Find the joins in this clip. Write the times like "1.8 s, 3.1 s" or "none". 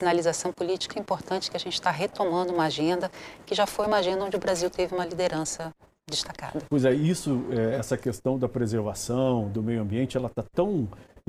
0.9 s